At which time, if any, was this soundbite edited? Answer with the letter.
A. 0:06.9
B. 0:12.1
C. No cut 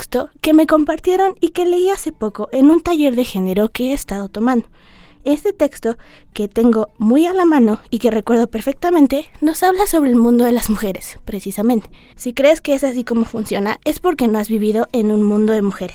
B